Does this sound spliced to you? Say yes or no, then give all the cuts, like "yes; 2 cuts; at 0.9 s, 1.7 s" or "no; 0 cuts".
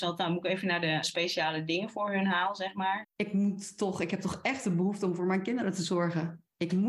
yes; 2 cuts; at 1.0 s, 3.0 s